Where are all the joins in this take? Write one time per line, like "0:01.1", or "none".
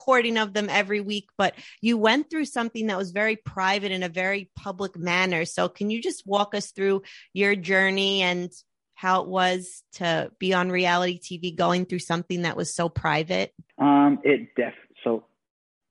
0:13.7